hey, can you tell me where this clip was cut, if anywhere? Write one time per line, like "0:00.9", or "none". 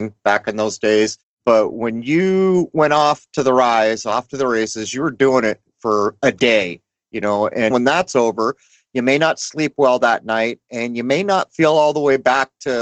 0:07.7